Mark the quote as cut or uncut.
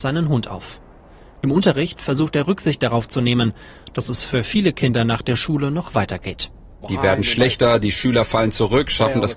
cut